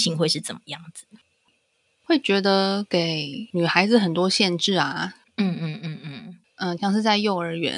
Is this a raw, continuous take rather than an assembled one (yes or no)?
no